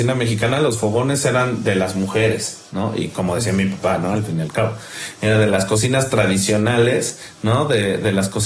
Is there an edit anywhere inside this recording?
no; 0 cuts

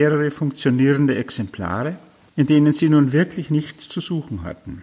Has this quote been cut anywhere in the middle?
yes; 1 cut; at 2.3 s

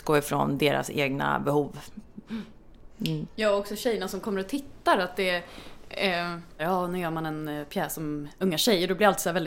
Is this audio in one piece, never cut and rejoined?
no; 1 cut; at 6.6 s

